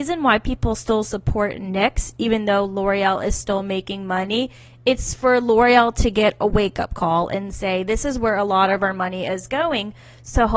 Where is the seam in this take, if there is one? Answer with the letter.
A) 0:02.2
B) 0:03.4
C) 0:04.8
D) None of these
D